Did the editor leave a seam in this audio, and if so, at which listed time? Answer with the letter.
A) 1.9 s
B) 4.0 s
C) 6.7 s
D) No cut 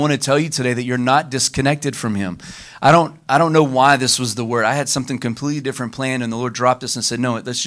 D